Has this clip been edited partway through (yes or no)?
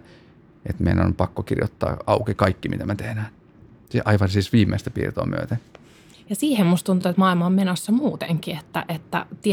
no